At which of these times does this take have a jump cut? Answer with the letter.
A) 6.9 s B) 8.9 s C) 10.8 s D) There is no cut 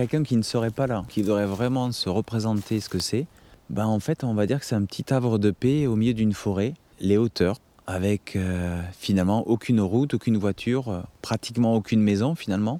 A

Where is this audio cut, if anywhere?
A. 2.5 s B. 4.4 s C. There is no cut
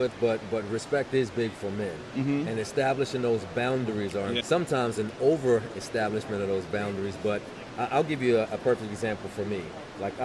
B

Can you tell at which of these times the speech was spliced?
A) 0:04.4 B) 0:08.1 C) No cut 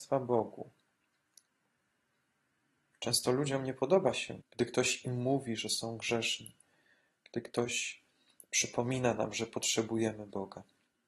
A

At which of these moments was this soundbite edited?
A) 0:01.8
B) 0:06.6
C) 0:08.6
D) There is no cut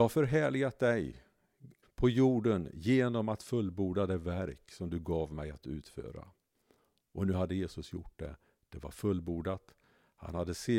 A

